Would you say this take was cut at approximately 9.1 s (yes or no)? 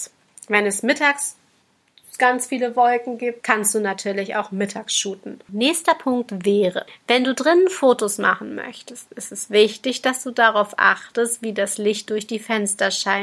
no